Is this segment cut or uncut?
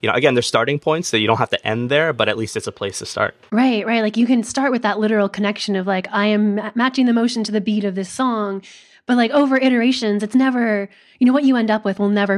uncut